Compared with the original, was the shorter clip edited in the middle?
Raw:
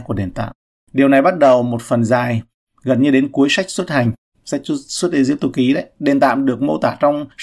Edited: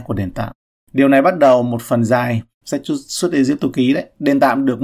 yes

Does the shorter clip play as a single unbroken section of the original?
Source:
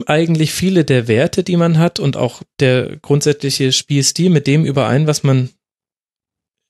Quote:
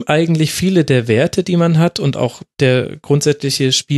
yes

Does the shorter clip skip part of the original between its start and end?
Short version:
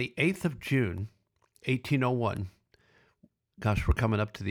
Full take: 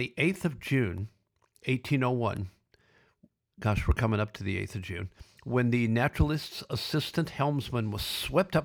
no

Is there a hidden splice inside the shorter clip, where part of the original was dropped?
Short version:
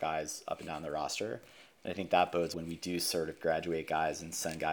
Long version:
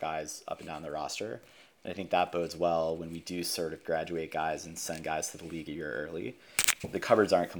yes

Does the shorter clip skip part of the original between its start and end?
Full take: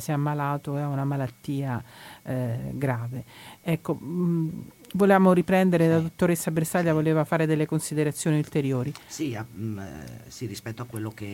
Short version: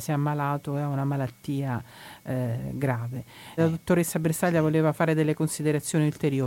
yes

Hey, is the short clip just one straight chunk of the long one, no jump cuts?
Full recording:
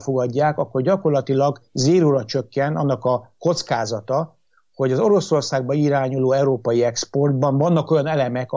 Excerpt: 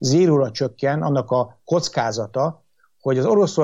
yes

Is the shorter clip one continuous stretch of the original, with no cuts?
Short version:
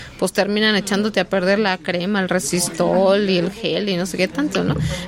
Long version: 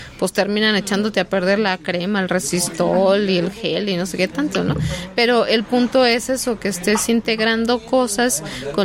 yes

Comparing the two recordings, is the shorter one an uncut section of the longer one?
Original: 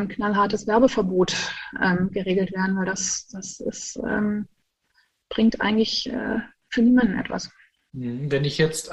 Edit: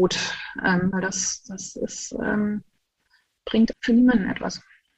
no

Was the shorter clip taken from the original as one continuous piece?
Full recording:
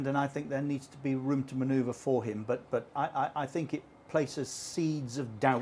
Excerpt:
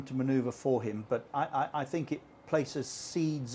no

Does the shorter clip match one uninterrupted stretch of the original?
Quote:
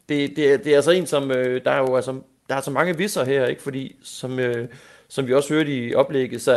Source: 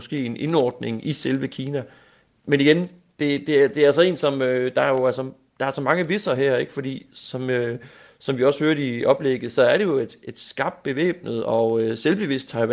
yes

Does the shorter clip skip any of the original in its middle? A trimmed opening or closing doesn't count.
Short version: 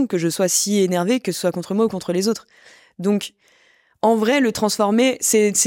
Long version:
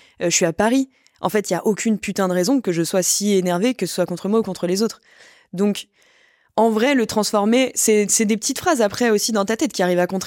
no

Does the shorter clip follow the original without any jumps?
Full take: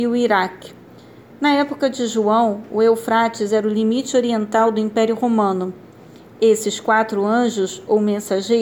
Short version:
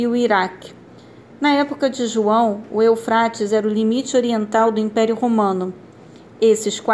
yes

